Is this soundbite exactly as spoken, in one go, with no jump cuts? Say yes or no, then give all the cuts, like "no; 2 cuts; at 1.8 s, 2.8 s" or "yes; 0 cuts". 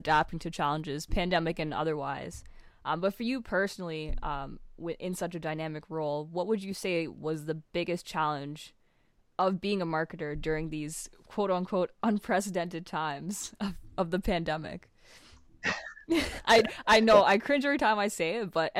yes; 0 cuts